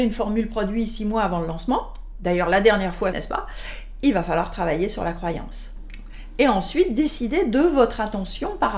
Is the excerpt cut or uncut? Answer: cut